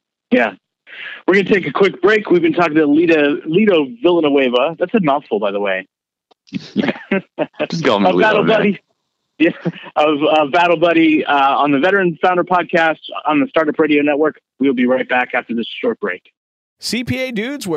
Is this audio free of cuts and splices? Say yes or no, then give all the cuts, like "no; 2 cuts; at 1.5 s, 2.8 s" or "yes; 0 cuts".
yes; 0 cuts